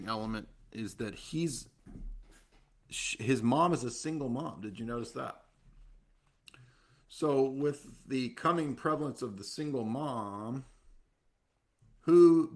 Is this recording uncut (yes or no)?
yes